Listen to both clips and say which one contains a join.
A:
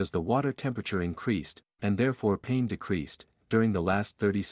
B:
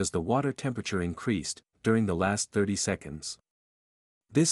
B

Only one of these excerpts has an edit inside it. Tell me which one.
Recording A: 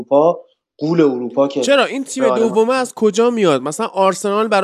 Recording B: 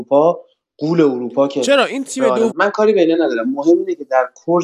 B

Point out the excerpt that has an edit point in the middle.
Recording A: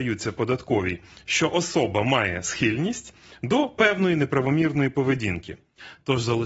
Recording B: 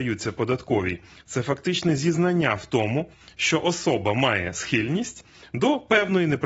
A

